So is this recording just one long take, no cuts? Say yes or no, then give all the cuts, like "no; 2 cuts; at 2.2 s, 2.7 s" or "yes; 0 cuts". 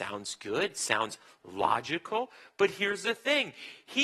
yes; 0 cuts